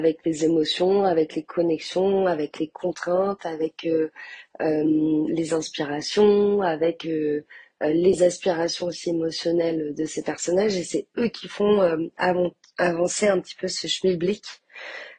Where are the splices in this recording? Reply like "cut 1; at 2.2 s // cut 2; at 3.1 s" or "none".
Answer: cut 1; at 5.3 s

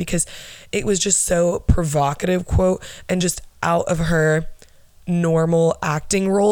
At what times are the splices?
none

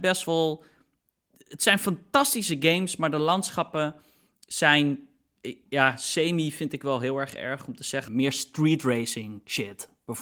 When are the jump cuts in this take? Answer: cut 1; at 8.1 s

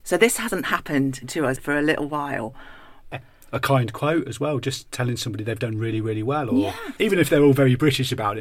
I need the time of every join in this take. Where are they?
cut 1; at 3.1 s // cut 2; at 7.0 s

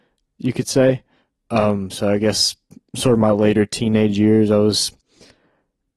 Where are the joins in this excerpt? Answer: none

